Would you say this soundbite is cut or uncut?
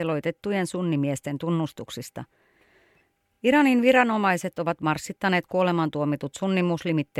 uncut